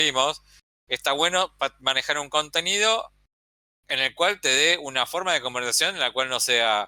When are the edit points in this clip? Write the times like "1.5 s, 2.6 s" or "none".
none

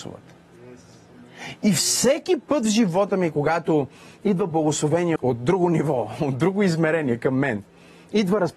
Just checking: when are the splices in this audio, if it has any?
5.2 s

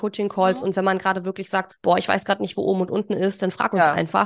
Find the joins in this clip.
1.7 s

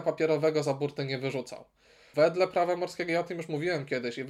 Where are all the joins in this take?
2.1 s

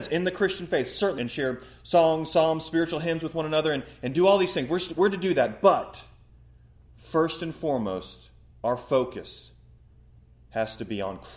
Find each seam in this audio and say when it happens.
1.2 s

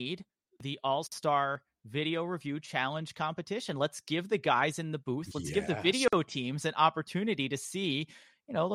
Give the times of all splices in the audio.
none

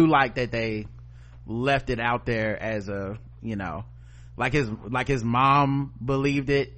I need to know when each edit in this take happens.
none

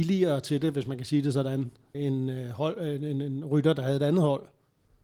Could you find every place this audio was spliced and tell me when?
1.9 s

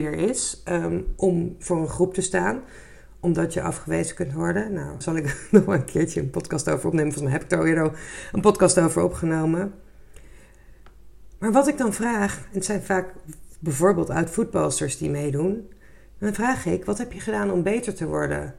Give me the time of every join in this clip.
5.0 s

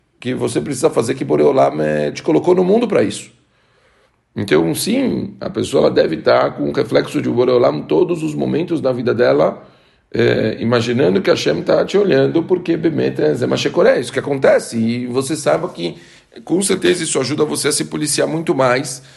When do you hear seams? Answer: none

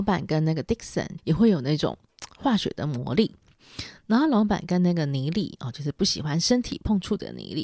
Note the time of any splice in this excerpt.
1.2 s

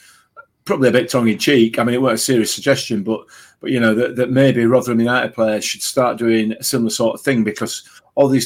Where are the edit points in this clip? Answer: none

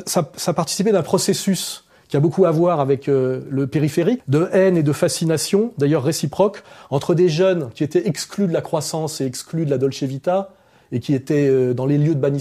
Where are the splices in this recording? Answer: 4.2 s

